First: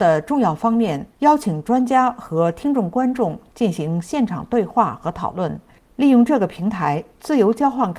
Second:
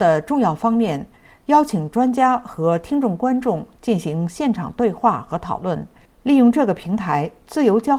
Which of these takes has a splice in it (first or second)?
first